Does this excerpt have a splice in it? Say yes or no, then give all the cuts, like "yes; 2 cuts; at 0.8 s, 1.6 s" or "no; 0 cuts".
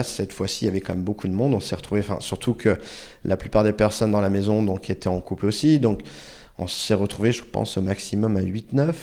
no; 0 cuts